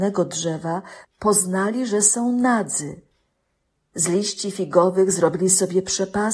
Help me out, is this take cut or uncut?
cut